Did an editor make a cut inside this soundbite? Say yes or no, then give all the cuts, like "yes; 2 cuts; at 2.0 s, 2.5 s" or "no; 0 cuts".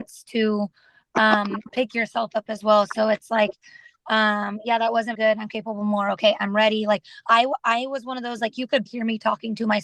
yes; 2 cuts; at 5.1 s, 8.9 s